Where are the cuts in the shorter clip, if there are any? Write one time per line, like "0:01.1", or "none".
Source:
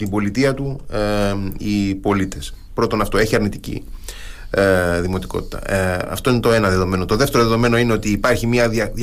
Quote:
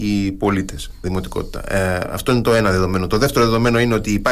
0:01.0